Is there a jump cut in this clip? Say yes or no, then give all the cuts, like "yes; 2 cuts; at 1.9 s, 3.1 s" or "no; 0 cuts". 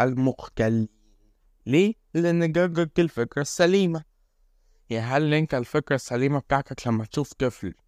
no; 0 cuts